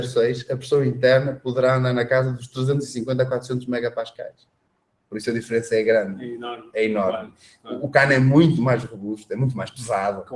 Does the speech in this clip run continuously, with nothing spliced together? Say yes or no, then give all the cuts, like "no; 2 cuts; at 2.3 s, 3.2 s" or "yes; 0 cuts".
yes; 0 cuts